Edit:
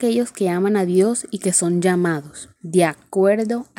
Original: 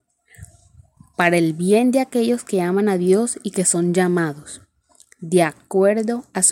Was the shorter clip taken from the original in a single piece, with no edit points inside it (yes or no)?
no